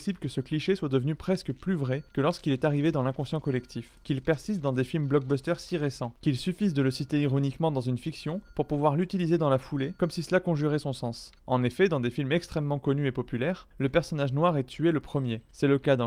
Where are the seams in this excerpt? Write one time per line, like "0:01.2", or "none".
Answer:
0:11.4